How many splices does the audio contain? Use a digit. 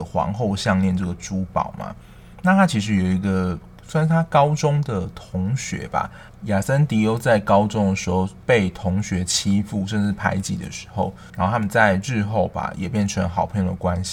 2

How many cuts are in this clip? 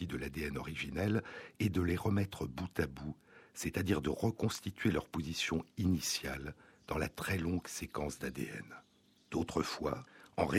1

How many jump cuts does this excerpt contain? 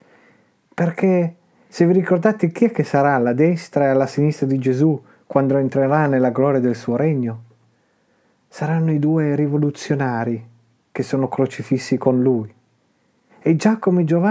1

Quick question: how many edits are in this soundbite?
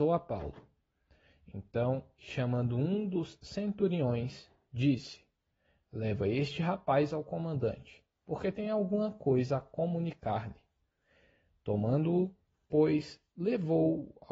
1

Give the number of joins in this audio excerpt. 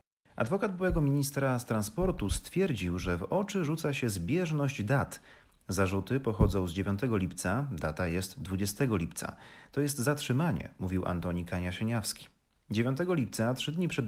0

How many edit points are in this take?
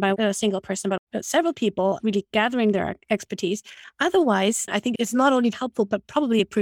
2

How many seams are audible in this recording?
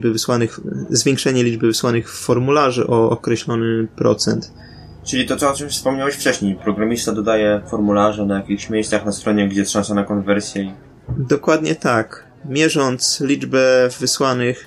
0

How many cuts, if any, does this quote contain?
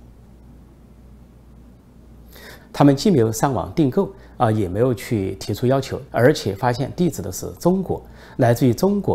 2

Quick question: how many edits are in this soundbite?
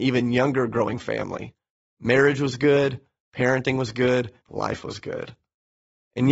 1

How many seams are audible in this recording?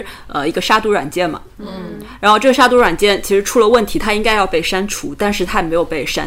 0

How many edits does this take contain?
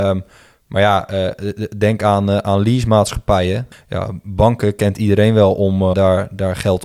2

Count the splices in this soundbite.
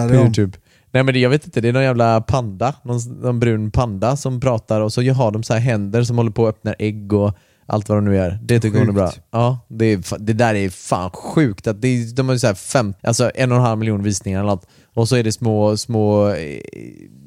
1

